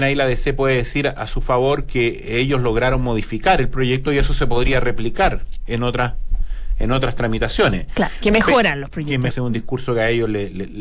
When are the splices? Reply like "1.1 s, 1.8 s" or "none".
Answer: 9.3 s